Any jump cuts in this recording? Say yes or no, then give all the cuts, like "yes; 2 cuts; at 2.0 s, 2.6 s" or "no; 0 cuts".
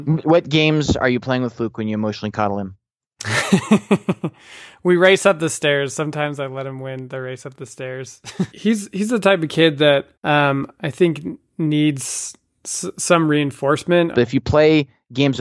yes; 3 cuts; at 8.5 s, 10.1 s, 14.1 s